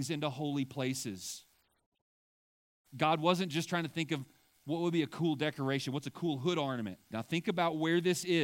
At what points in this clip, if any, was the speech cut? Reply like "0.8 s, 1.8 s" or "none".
7.1 s